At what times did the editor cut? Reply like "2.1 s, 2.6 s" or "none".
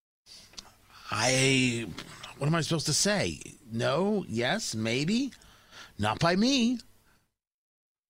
none

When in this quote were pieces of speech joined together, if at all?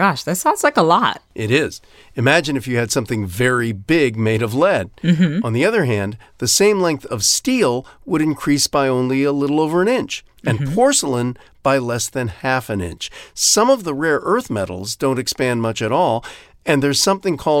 none

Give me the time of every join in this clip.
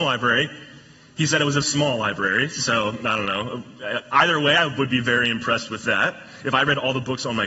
1.6 s

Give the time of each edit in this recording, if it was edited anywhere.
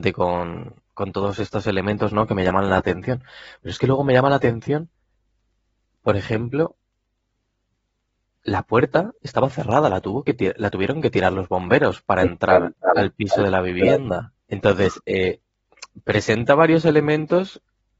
14.4 s

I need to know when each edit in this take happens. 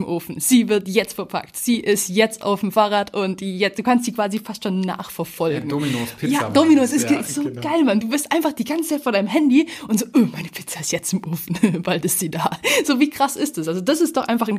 none

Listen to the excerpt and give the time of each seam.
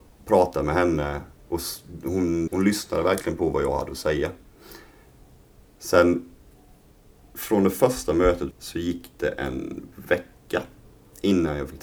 2.5 s, 8.5 s

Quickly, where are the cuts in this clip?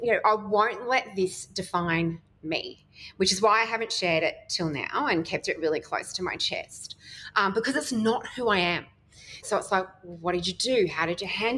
9.4 s

